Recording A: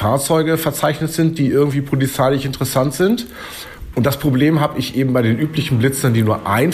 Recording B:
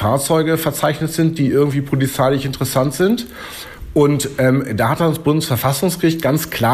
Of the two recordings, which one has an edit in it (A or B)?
A